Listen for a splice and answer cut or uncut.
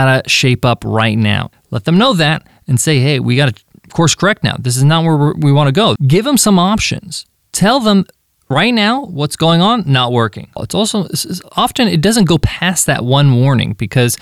cut